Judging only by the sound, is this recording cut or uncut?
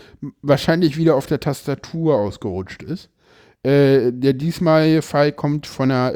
uncut